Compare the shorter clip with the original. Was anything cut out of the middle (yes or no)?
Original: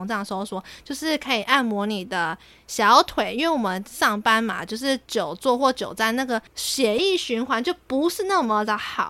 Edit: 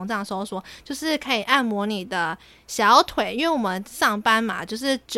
no